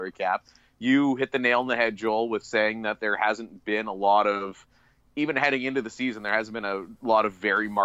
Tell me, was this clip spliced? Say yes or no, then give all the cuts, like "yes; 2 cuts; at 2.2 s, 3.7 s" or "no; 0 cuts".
no; 0 cuts